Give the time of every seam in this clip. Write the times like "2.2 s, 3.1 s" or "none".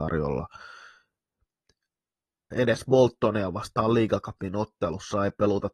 2.5 s